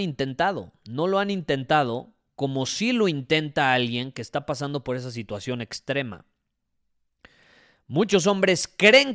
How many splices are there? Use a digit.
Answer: 0